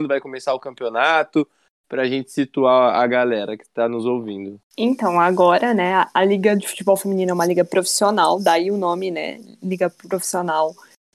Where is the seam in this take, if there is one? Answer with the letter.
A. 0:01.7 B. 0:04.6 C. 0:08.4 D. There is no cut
D